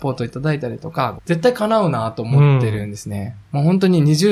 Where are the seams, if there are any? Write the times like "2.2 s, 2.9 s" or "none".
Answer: 1.2 s